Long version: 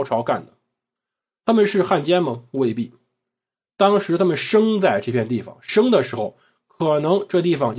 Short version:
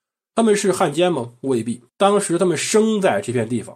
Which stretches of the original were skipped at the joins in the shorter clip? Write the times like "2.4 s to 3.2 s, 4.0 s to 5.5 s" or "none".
3.0 s to 3.7 s